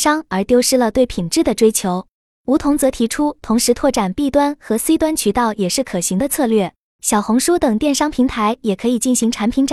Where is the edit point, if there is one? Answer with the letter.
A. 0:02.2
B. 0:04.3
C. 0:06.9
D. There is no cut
C